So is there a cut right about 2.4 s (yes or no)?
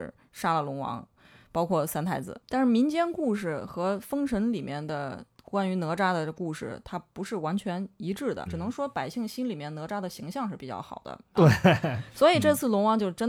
no